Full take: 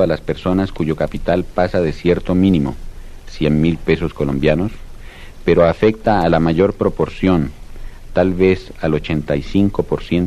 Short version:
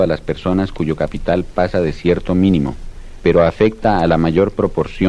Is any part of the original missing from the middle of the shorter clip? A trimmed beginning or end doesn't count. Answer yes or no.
yes